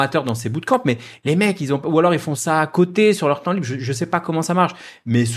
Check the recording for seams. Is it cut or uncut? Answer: uncut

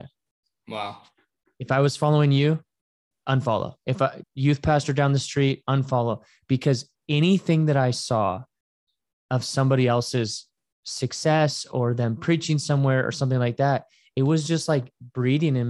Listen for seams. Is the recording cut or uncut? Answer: cut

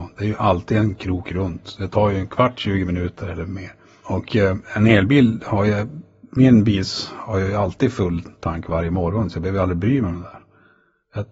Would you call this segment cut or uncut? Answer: uncut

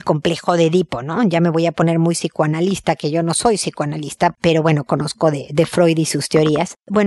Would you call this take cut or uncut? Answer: uncut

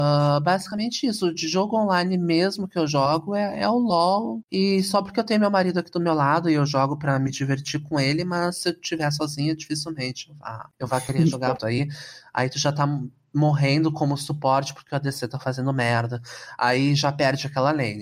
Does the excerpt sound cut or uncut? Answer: cut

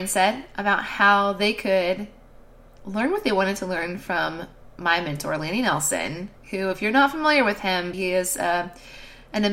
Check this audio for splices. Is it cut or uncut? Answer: cut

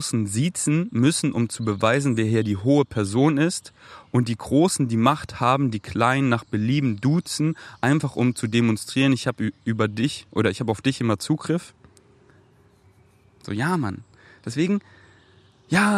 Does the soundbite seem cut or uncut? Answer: uncut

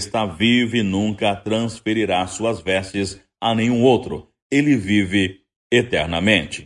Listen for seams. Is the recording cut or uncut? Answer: uncut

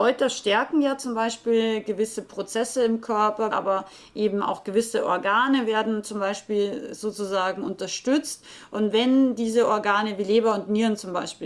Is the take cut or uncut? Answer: cut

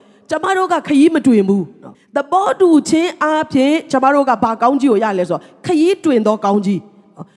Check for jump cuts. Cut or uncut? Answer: cut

